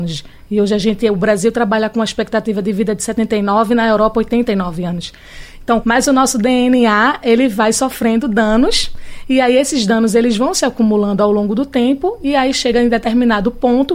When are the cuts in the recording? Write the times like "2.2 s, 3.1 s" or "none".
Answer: 5.8 s